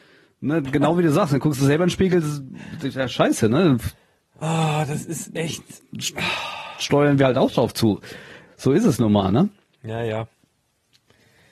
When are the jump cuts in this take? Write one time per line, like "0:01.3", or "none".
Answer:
none